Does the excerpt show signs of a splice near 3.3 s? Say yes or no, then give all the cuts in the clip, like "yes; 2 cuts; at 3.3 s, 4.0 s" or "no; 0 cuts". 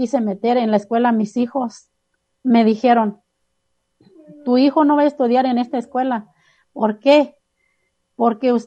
no; 0 cuts